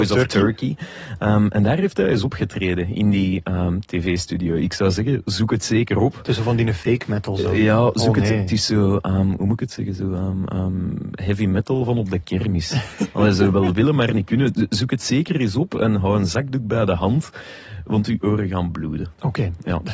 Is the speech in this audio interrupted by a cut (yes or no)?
no